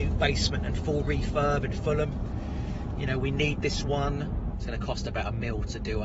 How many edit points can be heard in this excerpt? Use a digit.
1